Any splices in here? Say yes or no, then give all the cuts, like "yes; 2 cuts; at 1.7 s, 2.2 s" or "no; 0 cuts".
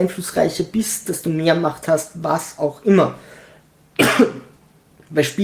no; 0 cuts